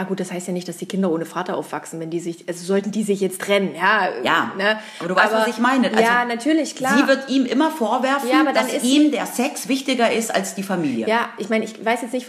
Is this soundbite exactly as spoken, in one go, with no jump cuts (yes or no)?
yes